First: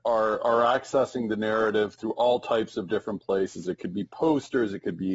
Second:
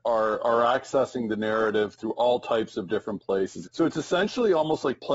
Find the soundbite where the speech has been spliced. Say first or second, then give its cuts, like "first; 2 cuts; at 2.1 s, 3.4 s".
second; 1 cut; at 3.6 s